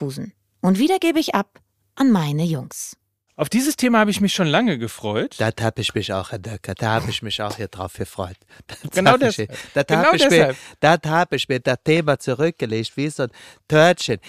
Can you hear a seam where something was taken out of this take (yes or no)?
no